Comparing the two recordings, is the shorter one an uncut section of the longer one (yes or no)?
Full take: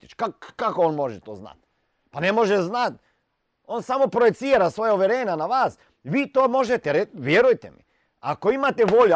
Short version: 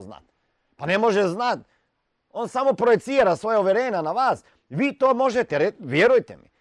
yes